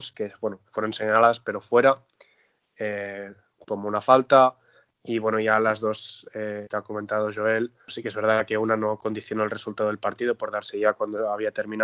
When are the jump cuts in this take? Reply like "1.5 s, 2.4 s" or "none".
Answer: 6.7 s, 7.9 s